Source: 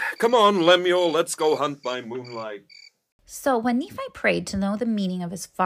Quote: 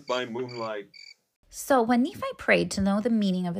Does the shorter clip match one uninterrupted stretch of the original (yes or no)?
yes